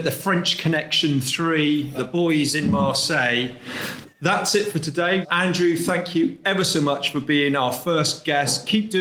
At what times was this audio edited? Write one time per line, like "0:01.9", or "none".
0:01.9
0:05.2

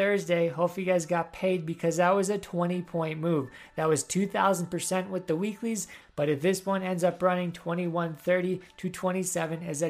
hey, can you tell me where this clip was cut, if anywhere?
0:06.0

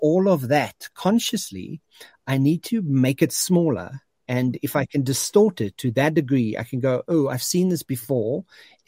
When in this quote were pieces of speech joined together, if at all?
none

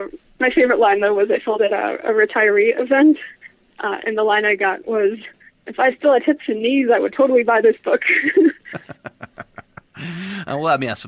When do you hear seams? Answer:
none

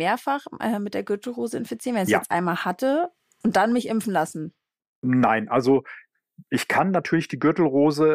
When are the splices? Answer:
none

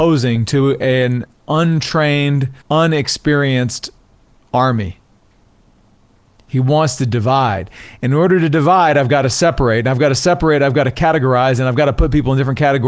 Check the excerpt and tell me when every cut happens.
0:02.6
0:06.4

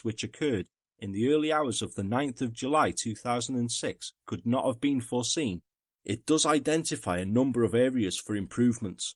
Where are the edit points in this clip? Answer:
none

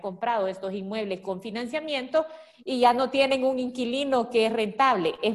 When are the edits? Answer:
none

